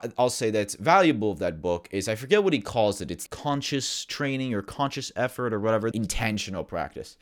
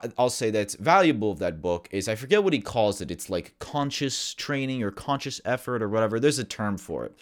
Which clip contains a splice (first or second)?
first